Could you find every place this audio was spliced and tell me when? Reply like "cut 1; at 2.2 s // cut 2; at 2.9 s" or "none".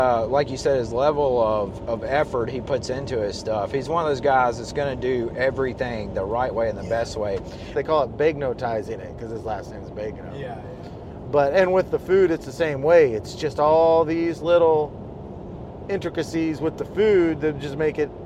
cut 1; at 7.7 s

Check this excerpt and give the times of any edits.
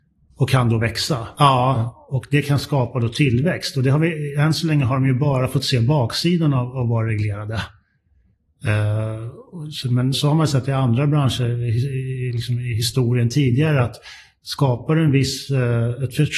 cut 1; at 1.3 s // cut 2; at 10.1 s

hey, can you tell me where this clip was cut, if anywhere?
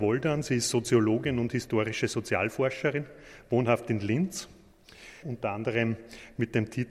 cut 1; at 5.2 s

